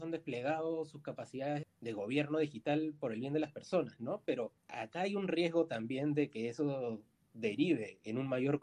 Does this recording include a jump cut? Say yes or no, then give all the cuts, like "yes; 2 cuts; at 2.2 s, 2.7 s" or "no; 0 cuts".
yes; 2 cuts; at 1.6 s, 4.6 s